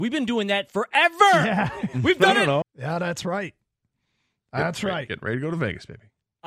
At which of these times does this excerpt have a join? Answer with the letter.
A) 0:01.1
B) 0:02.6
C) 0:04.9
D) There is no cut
B